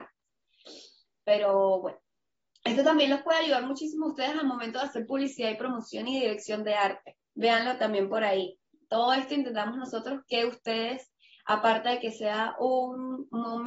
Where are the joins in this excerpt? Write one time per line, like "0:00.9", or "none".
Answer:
0:07.3